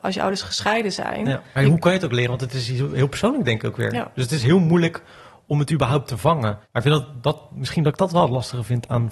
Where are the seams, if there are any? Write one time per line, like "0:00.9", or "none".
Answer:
0:01.6